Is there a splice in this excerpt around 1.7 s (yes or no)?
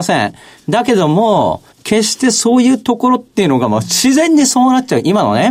yes